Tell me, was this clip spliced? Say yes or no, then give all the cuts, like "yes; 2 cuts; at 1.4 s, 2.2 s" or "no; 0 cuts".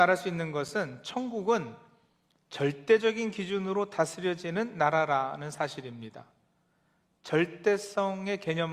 no; 0 cuts